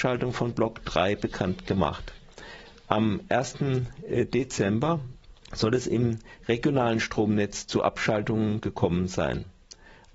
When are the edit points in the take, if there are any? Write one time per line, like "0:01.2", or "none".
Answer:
0:05.4